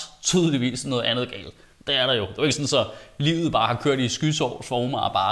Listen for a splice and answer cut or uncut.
uncut